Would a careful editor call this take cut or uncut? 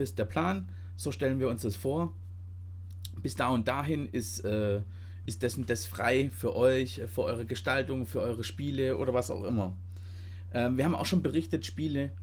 cut